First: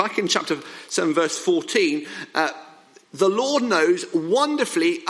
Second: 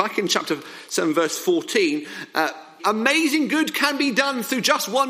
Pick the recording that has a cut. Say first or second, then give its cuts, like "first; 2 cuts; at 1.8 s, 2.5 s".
second; 1 cut; at 2.8 s